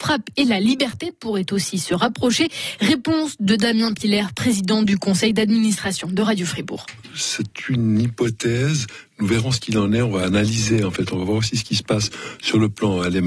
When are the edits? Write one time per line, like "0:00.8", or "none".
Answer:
none